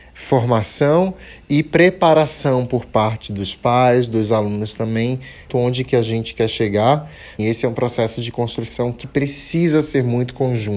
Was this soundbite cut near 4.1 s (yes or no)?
no